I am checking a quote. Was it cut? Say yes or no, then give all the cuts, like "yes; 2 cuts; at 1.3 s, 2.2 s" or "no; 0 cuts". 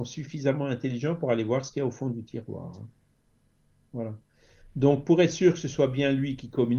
no; 0 cuts